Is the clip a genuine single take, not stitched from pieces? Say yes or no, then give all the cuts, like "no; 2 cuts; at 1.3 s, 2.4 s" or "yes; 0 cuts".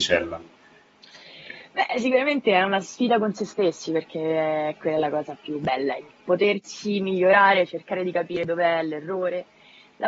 yes; 0 cuts